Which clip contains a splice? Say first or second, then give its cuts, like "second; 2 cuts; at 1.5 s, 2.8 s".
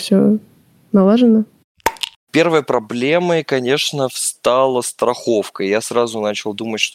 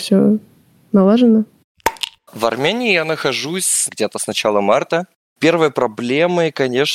first; 1 cut; at 2.1 s